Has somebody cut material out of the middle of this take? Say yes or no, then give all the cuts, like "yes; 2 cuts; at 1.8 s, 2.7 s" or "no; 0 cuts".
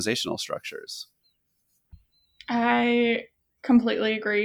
no; 0 cuts